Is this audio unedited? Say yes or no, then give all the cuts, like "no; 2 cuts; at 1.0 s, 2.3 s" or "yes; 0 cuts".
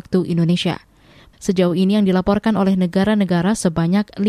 no; 1 cut; at 1.3 s